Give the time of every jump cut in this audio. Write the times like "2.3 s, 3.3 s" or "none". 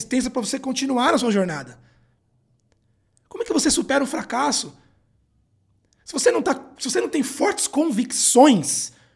none